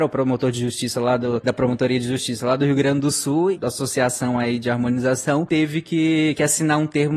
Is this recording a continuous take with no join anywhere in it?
no; 1 cut; at 3.5 s

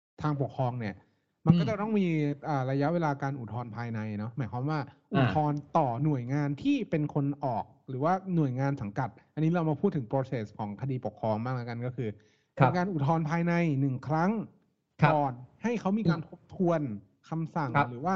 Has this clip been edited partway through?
no; 0 cuts

